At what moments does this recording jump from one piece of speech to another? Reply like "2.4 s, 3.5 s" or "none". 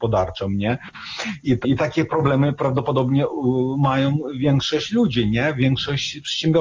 1.6 s

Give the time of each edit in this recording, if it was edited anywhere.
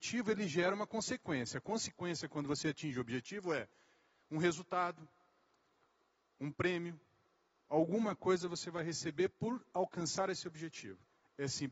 none

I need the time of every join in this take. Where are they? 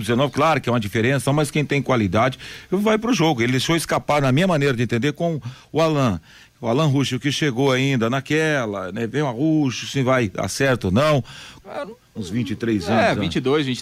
1.3 s, 11.6 s

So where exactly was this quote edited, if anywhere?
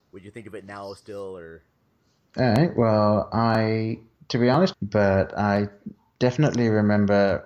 4.7 s

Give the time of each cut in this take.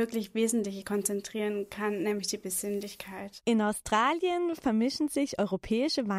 none

